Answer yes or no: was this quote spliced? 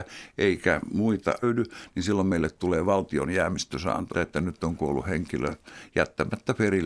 yes